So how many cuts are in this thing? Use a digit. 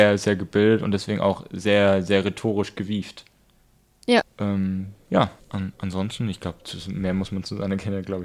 2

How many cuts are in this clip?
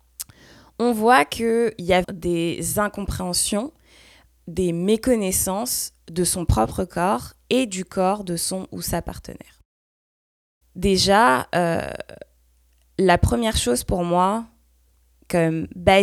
1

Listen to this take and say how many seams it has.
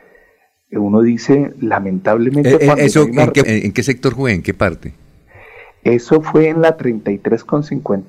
1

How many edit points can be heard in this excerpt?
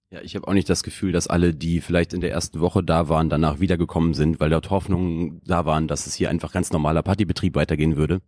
0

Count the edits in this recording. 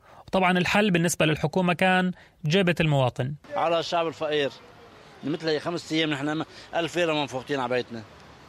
0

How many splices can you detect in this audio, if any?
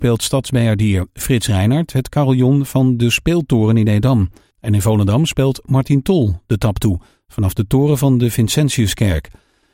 1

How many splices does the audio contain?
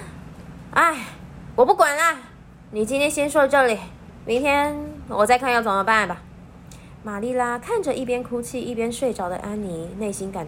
1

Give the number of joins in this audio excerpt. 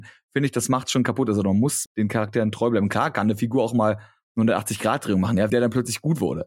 2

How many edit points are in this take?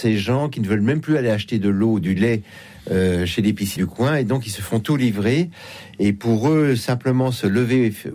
1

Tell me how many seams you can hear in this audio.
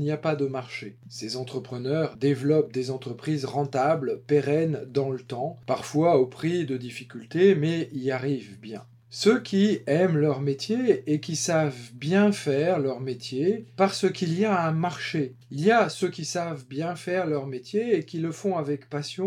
1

